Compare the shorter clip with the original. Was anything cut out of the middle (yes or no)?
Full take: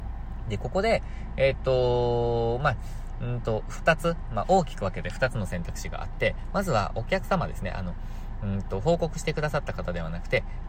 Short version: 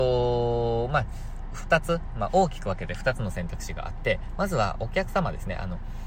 yes